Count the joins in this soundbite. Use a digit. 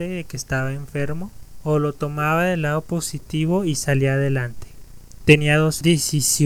0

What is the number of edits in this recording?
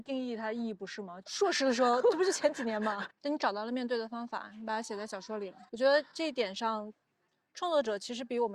3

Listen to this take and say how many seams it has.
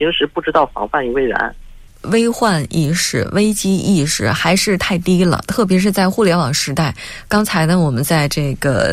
1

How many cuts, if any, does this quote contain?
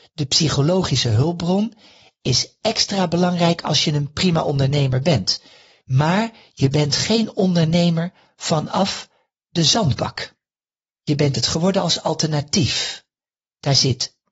1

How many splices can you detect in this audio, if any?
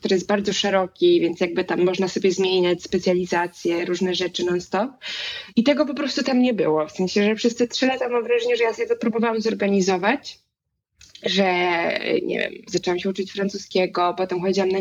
2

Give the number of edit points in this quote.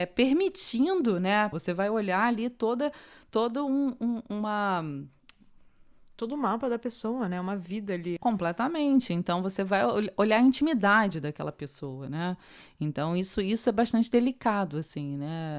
2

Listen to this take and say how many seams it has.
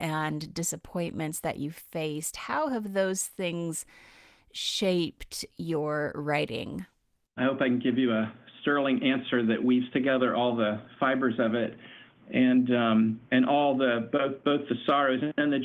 3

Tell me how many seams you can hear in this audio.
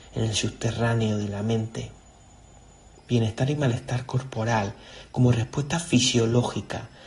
1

